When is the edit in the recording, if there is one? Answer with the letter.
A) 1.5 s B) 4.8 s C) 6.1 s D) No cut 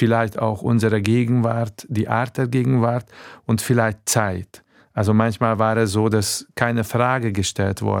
D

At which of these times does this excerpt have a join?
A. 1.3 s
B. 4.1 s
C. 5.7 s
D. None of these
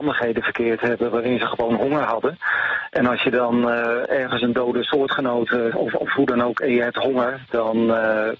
C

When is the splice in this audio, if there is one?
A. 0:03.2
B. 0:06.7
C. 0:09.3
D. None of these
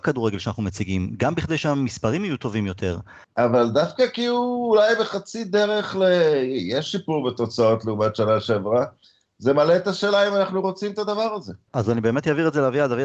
A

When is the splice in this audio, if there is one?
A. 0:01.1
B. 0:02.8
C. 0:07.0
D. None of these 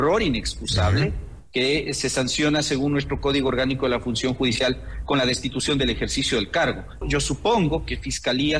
C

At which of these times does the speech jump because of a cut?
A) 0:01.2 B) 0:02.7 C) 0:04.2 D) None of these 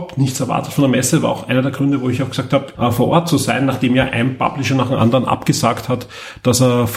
B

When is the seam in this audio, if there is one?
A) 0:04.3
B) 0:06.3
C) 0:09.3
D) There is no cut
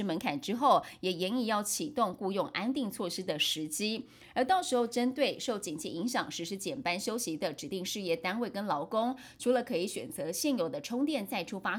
D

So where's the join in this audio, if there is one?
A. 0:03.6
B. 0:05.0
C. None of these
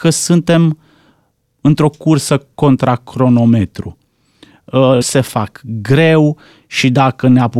B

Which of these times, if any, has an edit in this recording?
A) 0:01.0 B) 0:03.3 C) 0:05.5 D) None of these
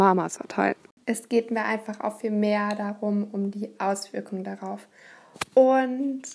A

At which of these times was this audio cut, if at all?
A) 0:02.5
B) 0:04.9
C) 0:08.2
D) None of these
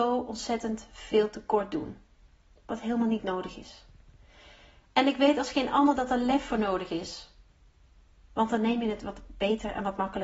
C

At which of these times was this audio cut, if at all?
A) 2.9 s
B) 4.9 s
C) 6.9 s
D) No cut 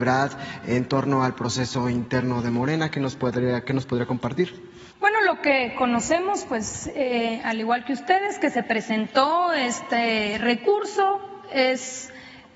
B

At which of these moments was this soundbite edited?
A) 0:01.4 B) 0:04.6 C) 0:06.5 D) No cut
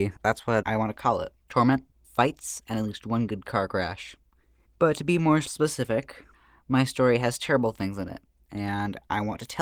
A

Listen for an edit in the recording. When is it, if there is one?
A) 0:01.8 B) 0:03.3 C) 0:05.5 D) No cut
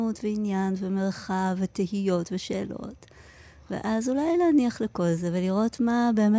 D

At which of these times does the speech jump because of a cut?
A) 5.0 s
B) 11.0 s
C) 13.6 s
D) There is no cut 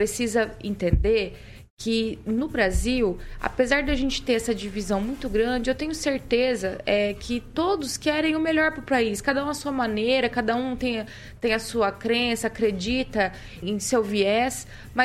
C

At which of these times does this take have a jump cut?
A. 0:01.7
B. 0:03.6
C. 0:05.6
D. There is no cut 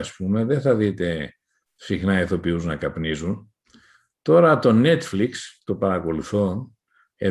D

